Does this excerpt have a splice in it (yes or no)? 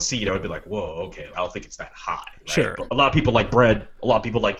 yes